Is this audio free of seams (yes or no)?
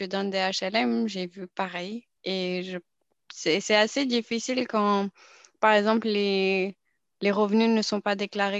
no